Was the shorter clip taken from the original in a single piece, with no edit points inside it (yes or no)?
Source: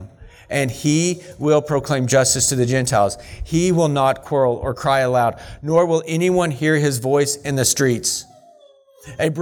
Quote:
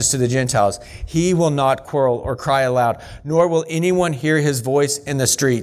yes